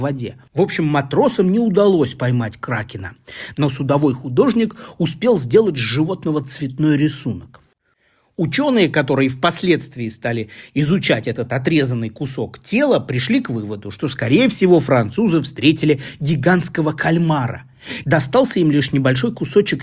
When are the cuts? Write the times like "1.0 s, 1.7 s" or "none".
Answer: 3.5 s, 18.0 s